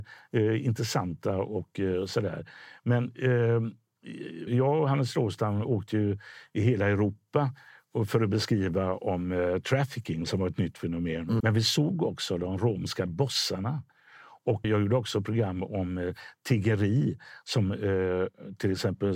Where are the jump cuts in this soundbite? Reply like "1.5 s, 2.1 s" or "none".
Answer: 4.5 s, 11.4 s, 14.6 s

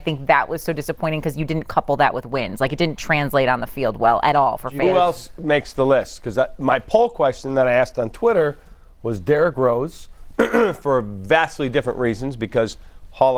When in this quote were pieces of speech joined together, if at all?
none

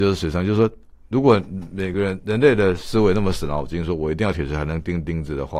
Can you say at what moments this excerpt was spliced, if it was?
none

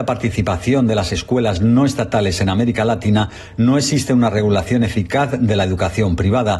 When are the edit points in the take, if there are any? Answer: none

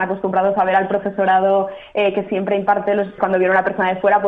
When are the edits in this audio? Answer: 3.2 s

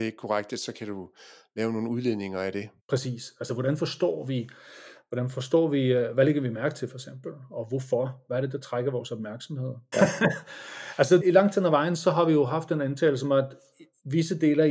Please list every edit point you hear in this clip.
2.8 s, 9.9 s, 11.2 s

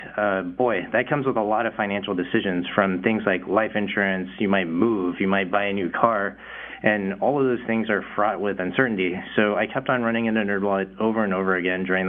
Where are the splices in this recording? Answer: none

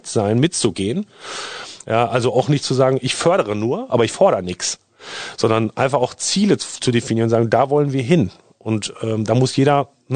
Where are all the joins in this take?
1.8 s

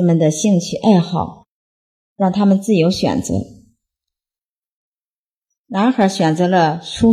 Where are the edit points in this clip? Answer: none

